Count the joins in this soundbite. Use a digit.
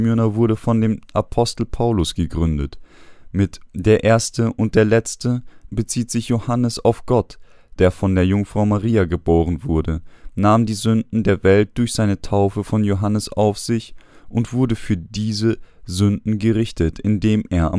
2